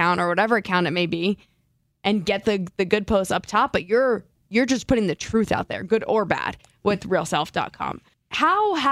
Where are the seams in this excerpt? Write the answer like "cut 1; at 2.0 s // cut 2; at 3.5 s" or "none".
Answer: none